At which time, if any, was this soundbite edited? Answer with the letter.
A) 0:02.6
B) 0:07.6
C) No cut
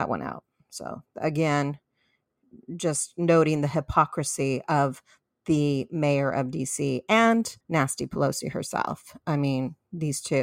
B